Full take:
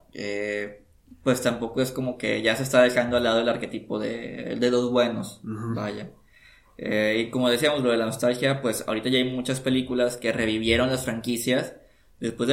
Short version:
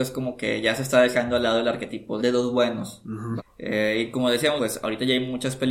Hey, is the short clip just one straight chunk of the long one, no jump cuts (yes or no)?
no